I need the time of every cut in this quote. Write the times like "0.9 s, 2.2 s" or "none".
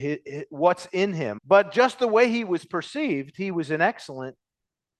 1.4 s